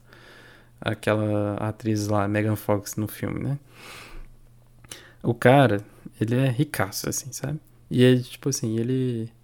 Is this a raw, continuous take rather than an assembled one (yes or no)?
yes